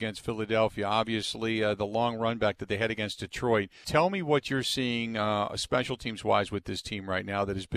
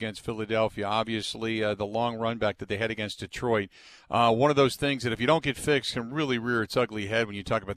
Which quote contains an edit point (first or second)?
first